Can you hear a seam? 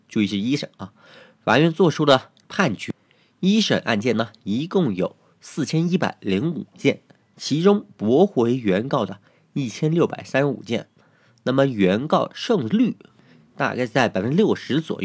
no; 0 cuts

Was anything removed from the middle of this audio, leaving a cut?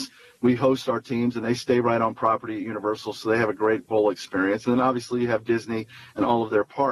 no; 0 cuts

